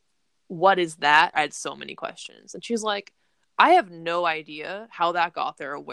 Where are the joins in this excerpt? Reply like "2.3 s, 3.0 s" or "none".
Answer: 1.3 s